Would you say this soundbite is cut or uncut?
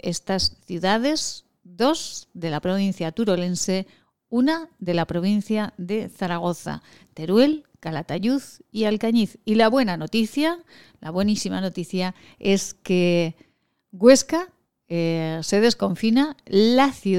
uncut